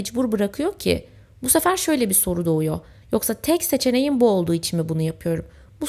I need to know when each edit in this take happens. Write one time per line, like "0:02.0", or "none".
0:03.0